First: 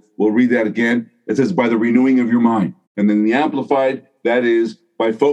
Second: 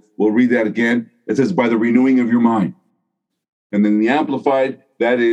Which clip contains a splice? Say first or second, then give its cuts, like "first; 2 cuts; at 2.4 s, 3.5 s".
first; 1 cut; at 2.8 s